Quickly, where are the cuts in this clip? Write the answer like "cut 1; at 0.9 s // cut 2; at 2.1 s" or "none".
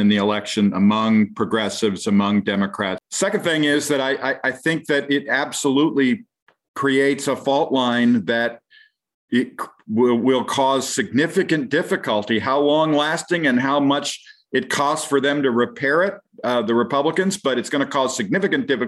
cut 1; at 3.0 s

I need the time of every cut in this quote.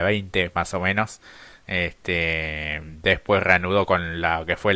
none

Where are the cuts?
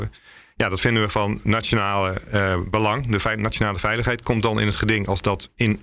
none

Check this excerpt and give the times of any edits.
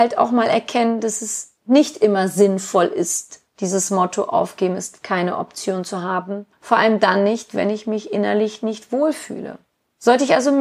none

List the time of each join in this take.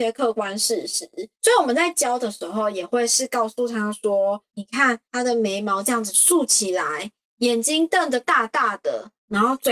none

